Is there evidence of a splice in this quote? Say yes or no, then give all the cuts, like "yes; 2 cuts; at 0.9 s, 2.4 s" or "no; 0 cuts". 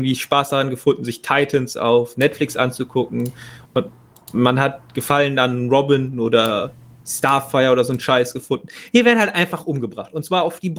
no; 0 cuts